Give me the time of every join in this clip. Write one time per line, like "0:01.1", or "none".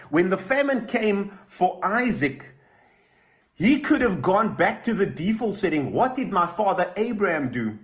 none